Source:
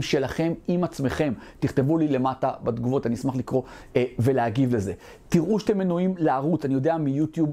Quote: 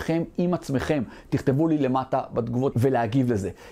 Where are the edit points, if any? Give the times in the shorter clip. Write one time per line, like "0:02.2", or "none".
0:02.7